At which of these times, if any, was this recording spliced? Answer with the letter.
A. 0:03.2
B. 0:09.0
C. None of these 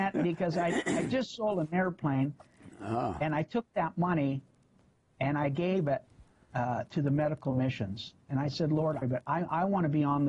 B